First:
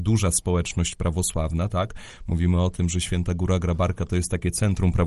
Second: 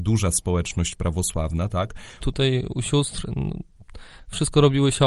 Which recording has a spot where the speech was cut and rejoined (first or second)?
second